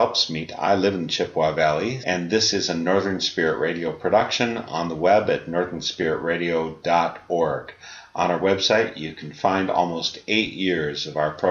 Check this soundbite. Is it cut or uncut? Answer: cut